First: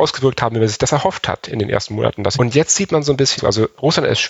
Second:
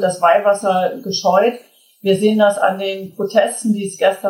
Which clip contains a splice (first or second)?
first